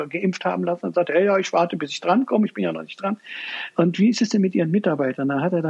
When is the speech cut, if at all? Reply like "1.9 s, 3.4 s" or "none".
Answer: none